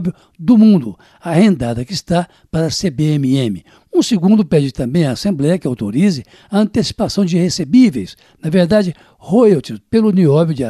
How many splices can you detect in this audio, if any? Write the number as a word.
one